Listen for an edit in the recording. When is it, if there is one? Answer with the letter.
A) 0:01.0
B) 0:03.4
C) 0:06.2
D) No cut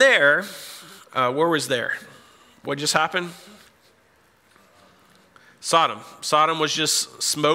D